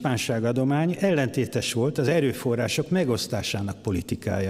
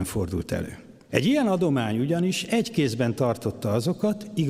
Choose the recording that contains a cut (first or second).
second